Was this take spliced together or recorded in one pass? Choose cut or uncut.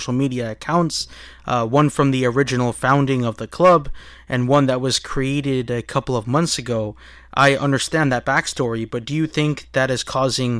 uncut